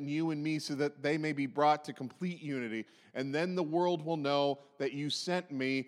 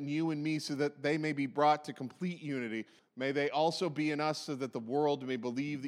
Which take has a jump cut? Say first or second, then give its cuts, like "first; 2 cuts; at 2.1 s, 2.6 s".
second; 1 cut; at 3.0 s